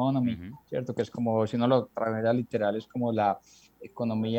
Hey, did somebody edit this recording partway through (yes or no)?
no